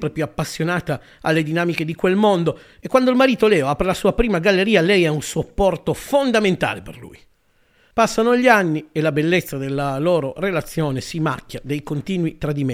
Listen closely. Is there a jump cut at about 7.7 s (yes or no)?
no